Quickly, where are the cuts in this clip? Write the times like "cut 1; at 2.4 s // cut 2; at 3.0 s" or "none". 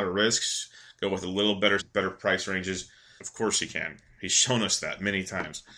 cut 1; at 1.8 s // cut 2; at 3.2 s